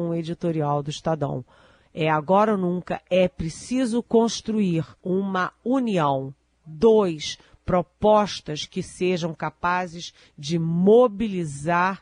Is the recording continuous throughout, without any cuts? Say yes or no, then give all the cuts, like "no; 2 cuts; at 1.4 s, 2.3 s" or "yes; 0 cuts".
no; 1 cut; at 5.0 s